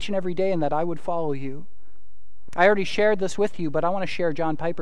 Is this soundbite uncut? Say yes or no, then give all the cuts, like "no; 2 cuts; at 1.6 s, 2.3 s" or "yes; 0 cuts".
yes; 0 cuts